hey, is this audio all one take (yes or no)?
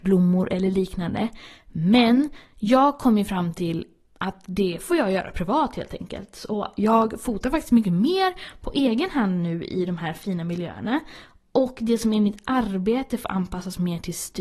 yes